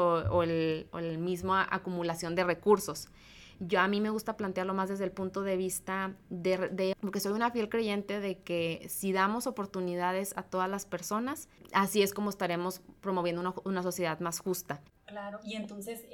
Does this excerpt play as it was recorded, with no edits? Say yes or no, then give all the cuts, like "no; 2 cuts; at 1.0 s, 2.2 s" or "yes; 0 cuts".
no; 2 cuts; at 6.9 s, 14.9 s